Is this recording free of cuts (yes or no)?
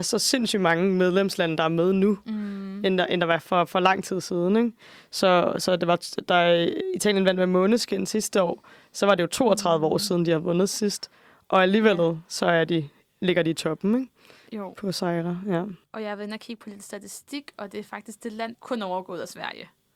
no